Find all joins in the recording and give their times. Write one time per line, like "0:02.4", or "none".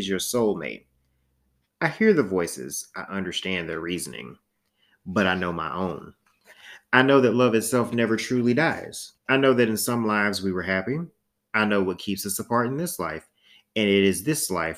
0:09.2